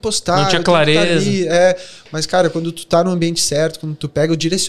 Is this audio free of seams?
yes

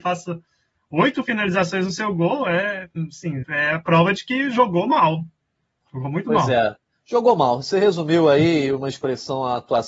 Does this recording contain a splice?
yes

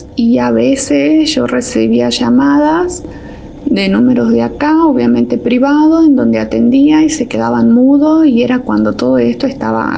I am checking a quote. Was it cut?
no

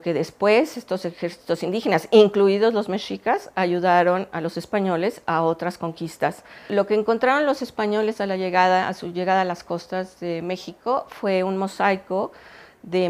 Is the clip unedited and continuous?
yes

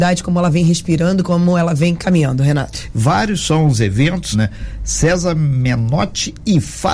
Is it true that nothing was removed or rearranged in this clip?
no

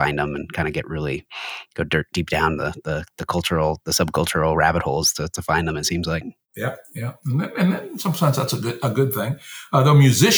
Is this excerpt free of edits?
yes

